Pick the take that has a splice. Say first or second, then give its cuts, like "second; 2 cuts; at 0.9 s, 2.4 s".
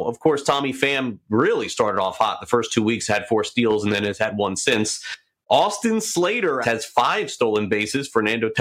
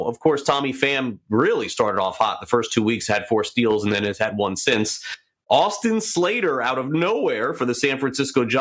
first; 1 cut; at 6.6 s